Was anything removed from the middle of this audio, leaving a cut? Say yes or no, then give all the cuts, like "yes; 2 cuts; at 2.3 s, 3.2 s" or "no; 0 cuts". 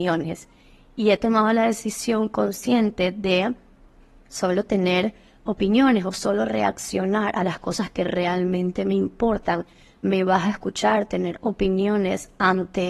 no; 0 cuts